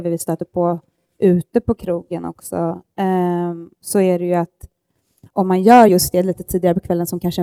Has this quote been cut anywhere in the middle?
no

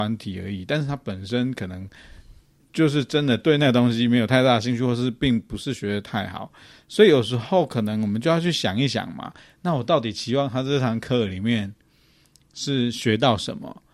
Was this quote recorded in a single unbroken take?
yes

